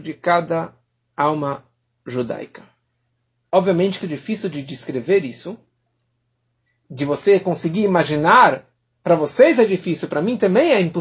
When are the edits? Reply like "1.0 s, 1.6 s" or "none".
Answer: 4.0 s

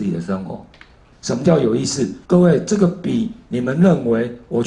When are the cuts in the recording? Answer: 1.1 s, 2.2 s

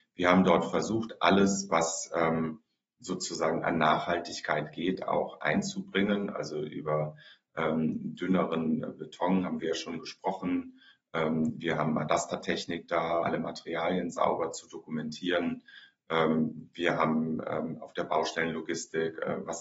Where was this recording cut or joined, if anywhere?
13.2 s

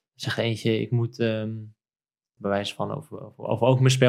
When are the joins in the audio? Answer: 2.4 s

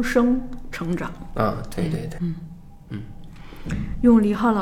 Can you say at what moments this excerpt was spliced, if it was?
2.2 s

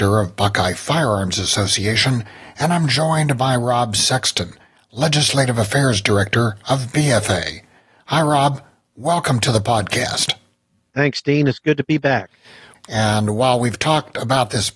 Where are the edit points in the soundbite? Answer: 12.7 s

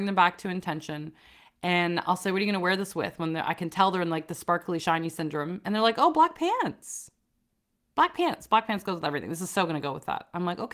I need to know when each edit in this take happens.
none

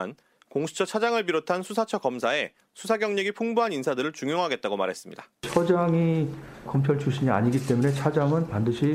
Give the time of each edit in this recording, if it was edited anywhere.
none

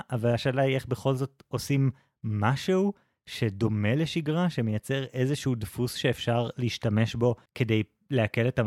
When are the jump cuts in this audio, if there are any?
7.5 s

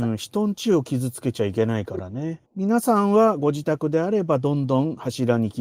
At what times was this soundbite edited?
2.5 s

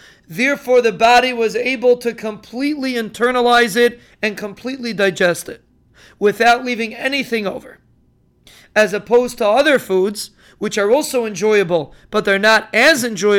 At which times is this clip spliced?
none

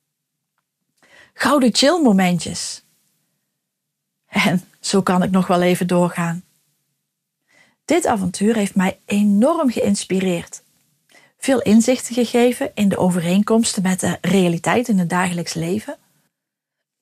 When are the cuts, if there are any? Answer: none

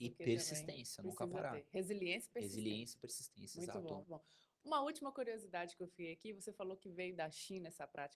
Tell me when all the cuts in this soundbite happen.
4.0 s

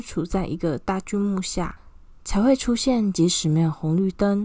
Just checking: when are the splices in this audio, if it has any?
none

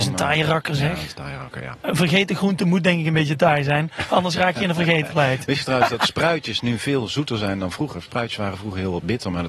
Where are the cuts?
none

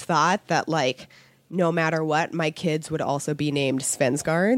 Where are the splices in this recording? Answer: none

